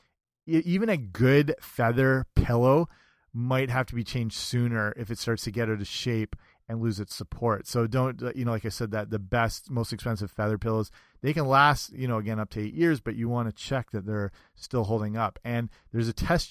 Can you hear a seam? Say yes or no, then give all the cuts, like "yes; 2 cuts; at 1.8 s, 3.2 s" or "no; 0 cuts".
no; 0 cuts